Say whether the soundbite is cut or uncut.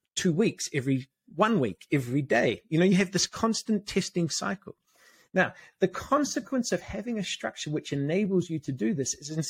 uncut